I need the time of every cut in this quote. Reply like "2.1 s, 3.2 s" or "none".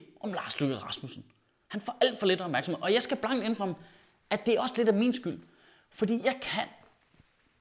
none